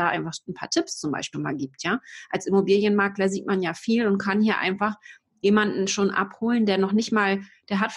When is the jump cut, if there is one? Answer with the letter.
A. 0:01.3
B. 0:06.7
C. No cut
A